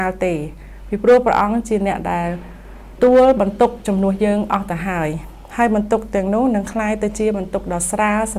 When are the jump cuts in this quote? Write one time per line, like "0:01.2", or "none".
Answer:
0:03.0